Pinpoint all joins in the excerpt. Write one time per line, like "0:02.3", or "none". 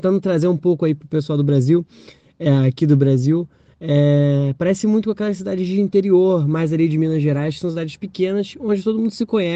none